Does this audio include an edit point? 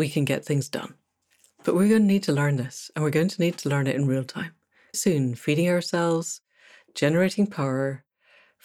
yes; 1 cut; at 4.9 s

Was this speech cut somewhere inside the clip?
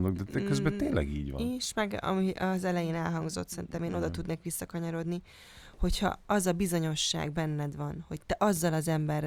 no; 0 cuts

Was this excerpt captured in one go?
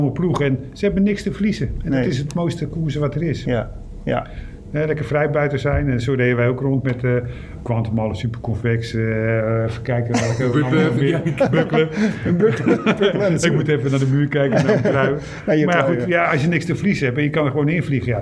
yes; 0 cuts

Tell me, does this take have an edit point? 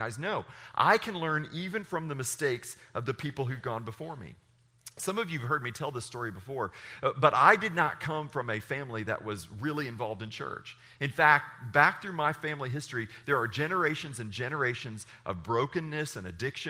no; 0 cuts

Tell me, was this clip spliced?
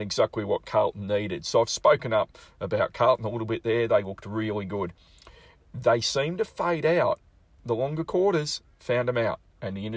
no; 0 cuts

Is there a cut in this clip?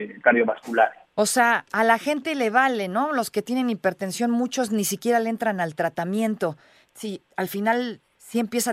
yes; 2 cuts; at 1.0 s, 6.8 s

